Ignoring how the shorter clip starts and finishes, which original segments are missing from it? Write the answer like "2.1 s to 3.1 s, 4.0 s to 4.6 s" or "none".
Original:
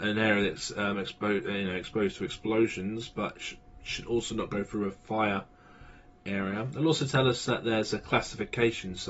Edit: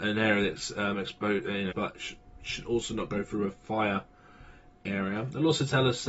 1.7 s to 3.1 s